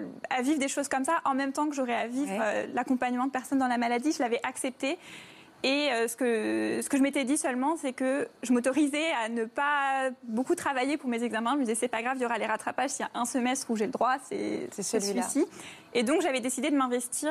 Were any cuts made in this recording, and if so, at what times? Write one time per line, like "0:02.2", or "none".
none